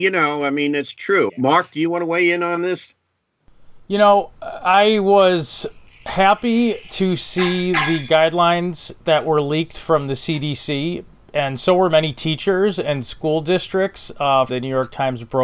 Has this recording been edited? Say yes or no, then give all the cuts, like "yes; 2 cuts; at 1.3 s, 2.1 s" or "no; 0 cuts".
yes; 2 cuts; at 1.3 s, 14.5 s